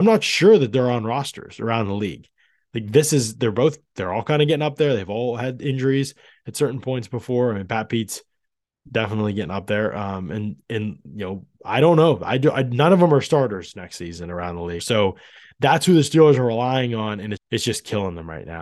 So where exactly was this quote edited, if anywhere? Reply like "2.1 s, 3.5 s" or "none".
14.8 s, 17.4 s